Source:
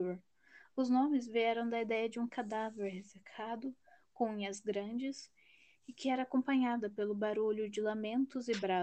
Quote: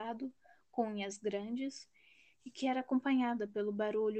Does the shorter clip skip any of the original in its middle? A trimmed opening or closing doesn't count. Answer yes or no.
no